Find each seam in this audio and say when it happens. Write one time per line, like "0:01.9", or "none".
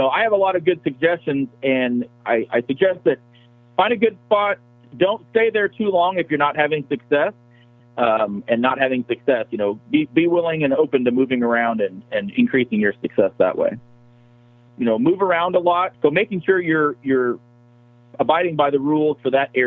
0:07.8
0:14.7
0:15.9